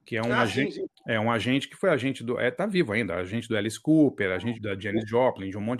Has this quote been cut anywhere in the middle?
yes; 1 cut; at 4.5 s

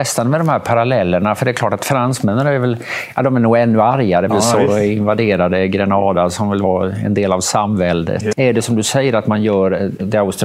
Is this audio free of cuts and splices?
no; 2 cuts; at 4.3 s, 8.3 s

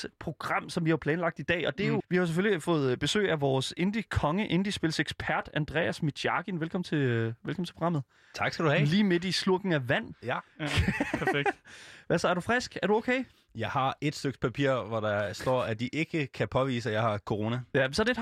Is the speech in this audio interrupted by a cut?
yes; 1 cut; at 2.0 s

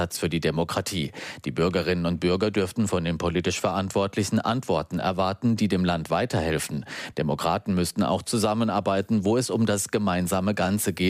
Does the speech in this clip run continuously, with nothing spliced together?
yes; 0 cuts

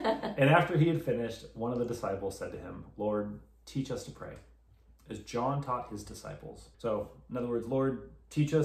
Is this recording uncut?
no; 1 cut; at 6.7 s

